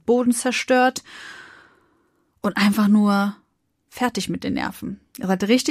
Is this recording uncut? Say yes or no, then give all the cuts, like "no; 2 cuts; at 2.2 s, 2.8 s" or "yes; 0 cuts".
yes; 0 cuts